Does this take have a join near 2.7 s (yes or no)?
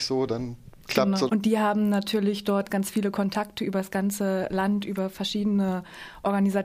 yes